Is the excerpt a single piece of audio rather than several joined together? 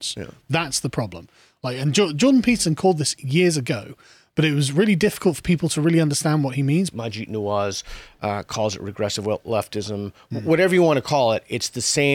no; 1 cut; at 6.9 s

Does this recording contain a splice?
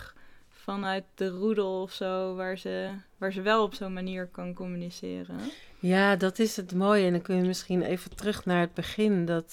no; 0 cuts

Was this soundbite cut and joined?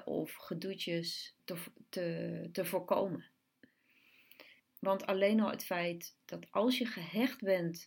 yes; 2 cuts; at 1.4 s, 4.6 s

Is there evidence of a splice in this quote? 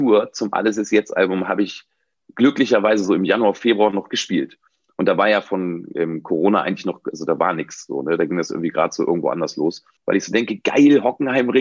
yes; 1 cut; at 10.0 s

